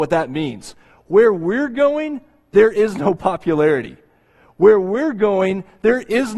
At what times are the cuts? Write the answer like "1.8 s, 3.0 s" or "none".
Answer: none

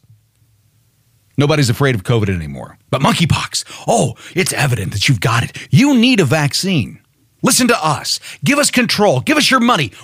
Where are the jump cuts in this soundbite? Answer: 4.3 s, 5.7 s, 7.4 s

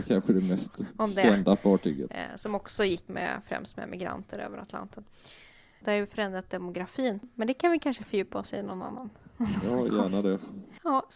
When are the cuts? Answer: 3.1 s, 5.8 s

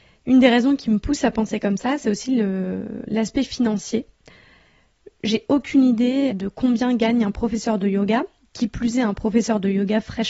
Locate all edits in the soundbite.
6.3 s

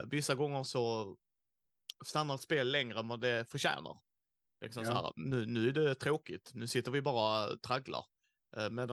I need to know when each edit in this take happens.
none

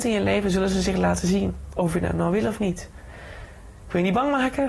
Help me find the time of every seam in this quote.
none

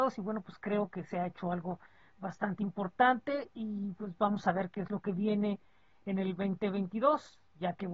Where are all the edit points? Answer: none

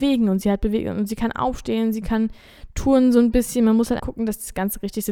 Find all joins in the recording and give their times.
4.0 s

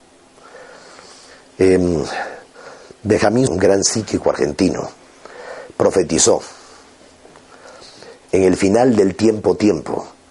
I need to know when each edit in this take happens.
3.5 s

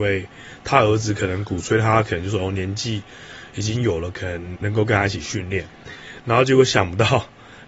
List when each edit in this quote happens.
4.5 s

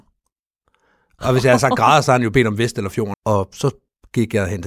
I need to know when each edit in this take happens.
1.2 s, 3.1 s

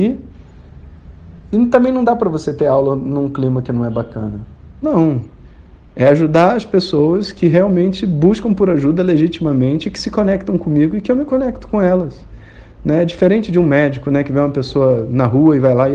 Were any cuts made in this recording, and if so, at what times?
4.8 s

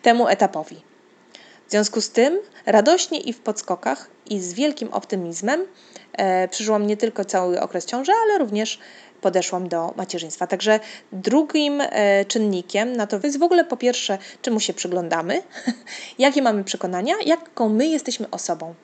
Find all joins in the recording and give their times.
13.2 s

